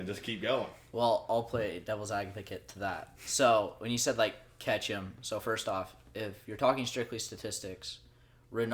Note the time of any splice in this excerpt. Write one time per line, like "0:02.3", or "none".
none